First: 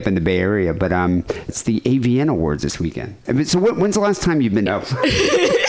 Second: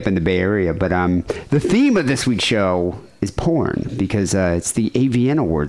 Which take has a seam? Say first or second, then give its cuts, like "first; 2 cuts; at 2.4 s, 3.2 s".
first; 3 cuts; at 1.5 s, 3.3 s, 4.7 s